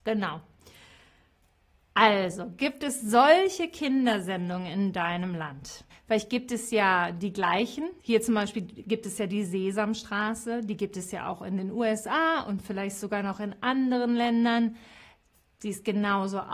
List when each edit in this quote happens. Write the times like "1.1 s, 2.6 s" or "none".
5.9 s, 8.0 s